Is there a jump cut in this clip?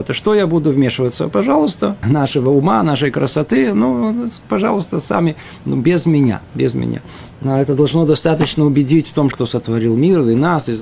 yes; 3 cuts; at 2.0 s, 7.3 s, 9.3 s

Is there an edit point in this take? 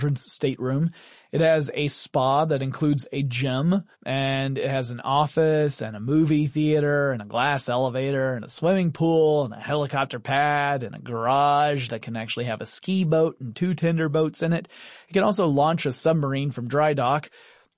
yes; 1 cut; at 3.9 s

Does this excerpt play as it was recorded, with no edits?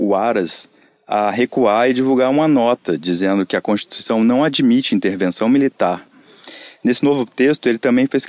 yes; 0 cuts

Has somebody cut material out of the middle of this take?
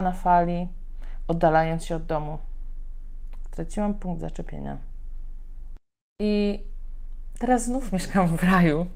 yes; 1 cut; at 3.4 s

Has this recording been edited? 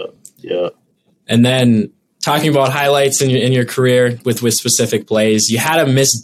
no; 0 cuts

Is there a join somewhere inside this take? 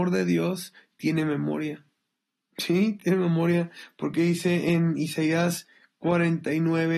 no; 0 cuts

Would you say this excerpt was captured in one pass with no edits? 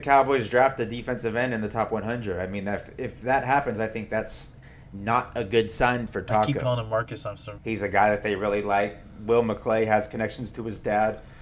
no; 1 cut; at 7.5 s

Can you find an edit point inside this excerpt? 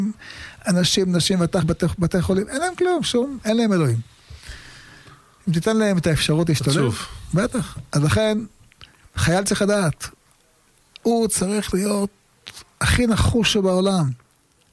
no; 0 cuts

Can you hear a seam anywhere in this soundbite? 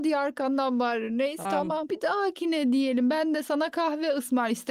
yes; 1 cut; at 1.4 s

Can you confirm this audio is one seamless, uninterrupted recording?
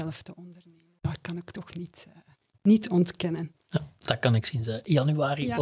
yes; 0 cuts

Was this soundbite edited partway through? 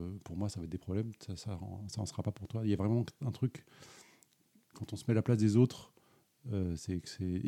no; 0 cuts

